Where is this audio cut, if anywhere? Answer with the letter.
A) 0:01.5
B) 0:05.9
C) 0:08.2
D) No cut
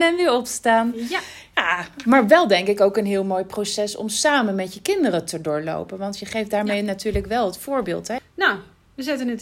C